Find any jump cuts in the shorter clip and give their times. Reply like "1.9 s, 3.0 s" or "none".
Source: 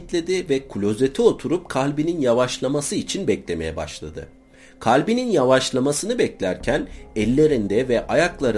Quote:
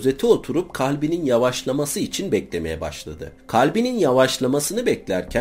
3.4 s

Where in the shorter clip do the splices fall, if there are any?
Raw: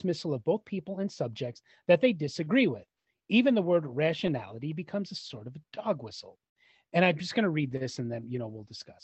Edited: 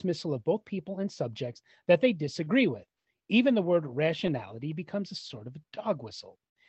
none

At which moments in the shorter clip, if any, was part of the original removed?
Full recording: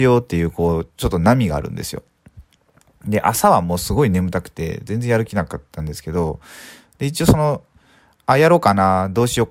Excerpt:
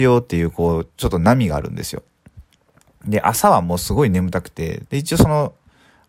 4.8 s

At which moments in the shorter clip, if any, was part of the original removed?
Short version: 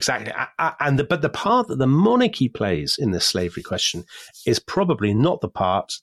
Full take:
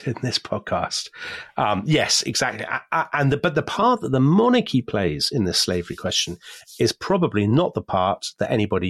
none

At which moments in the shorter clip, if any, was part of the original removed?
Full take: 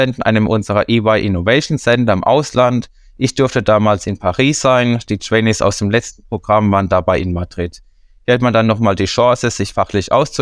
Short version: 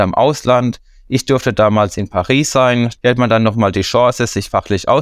2.9 s

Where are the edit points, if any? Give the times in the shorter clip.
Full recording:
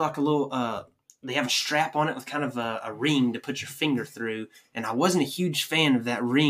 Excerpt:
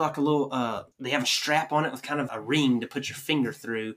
0.9 s, 2.3 s

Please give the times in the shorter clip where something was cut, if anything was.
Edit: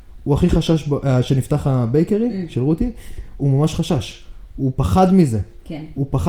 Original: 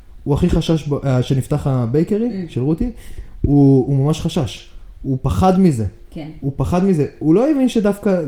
3.4 s

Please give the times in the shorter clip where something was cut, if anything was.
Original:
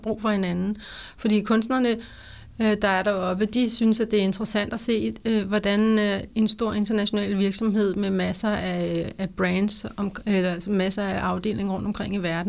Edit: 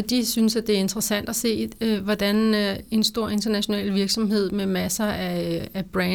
none

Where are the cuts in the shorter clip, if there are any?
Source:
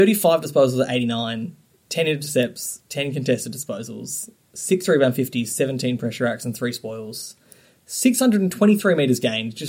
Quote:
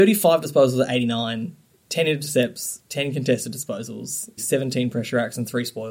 4.4 s

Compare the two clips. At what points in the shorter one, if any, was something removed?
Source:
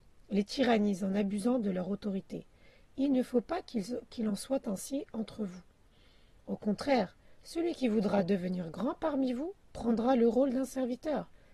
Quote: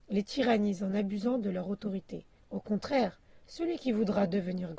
2.4 s

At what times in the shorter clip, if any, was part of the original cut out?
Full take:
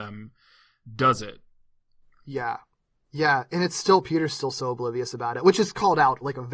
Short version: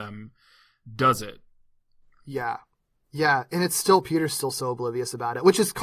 none

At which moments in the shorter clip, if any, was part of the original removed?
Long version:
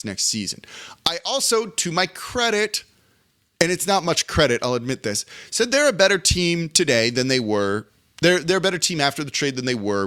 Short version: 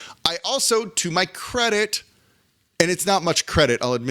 none

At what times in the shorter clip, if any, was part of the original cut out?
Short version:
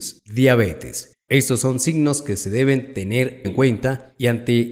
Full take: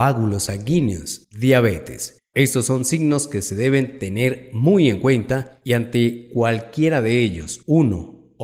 3.4 s

